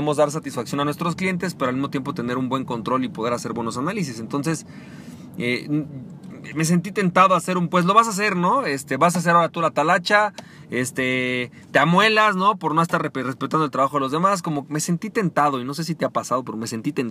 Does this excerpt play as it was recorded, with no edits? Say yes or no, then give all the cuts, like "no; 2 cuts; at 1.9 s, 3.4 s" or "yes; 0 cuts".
yes; 0 cuts